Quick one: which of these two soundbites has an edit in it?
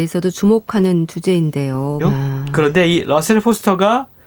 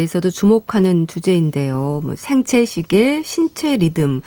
first; 1 cut; at 2.0 s

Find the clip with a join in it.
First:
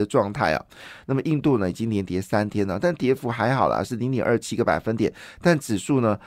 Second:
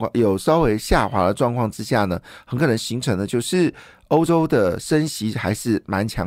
first; 1 cut; at 1.0 s

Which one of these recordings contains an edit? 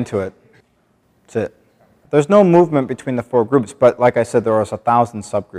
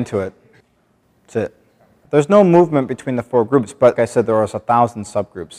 second; 1 cut; at 4.0 s

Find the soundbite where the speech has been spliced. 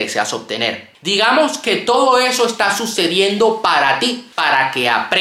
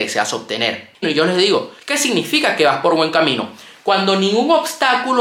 second; 1 cut; at 1.0 s

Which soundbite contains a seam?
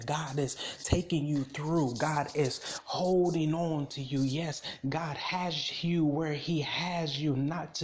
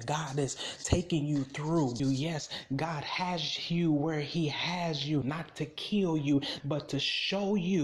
second; 3 cuts; at 2.0 s, 5.2 s, 6.6 s

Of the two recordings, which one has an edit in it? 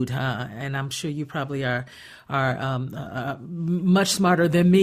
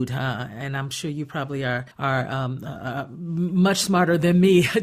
second; 1 cut; at 1.9 s

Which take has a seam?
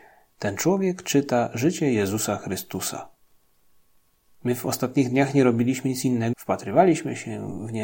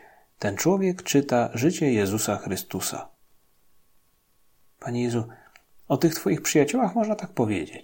first; 2 cuts; at 4.2 s, 6.3 s

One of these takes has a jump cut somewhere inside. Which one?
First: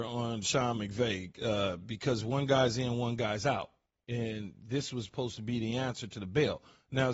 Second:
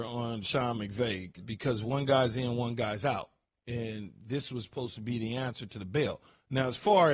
second; 1 cut; at 1.4 s

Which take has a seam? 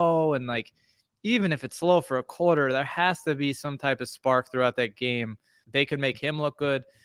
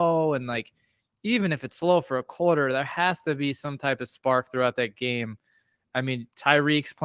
first; 1 cut; at 5.6 s

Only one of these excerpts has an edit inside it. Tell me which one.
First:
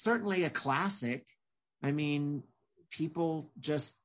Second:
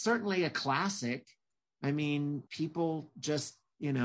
second; 1 cut; at 2.5 s

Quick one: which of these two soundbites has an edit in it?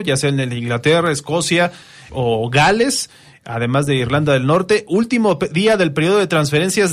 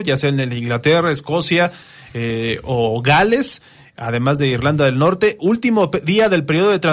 first; 1 cut; at 2.1 s

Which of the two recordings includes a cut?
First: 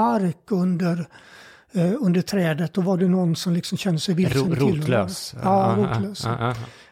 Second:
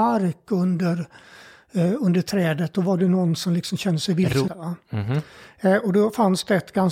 second; 1 cut; at 4.5 s

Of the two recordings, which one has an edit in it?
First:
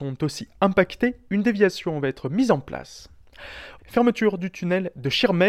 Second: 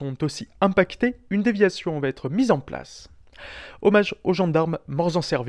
first; 1 cut; at 3.8 s

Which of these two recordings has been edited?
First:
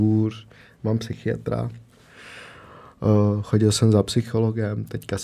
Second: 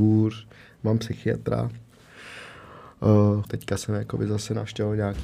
second; 1 cut; at 3.4 s

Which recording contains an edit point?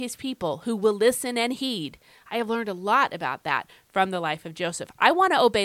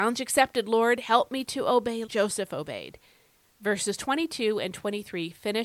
second; 1 cut; at 2.1 s

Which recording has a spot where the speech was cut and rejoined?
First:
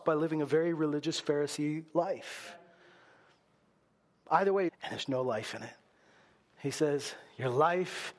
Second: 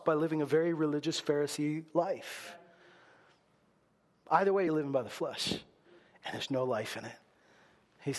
first; 1 cut; at 4.7 s

